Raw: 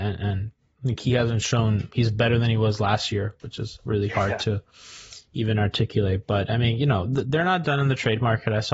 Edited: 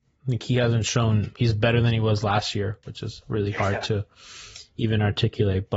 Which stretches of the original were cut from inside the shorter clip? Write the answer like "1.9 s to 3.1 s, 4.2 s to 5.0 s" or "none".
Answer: none